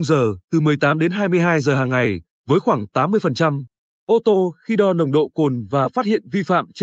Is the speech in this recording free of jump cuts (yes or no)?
no